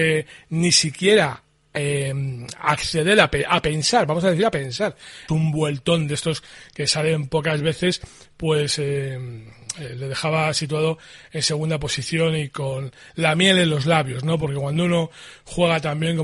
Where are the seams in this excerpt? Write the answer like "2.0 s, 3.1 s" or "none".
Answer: 5.3 s